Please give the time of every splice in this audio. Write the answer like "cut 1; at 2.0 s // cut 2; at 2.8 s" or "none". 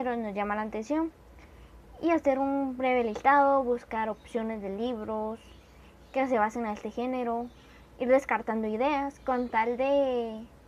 none